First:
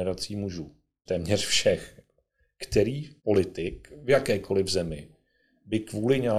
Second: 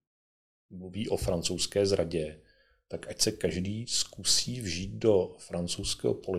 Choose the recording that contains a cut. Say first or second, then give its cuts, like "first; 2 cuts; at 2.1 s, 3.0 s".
first; 2 cuts; at 1.1 s, 3.2 s